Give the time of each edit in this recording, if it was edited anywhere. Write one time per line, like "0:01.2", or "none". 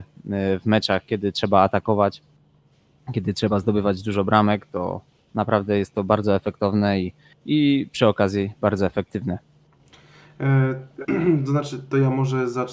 none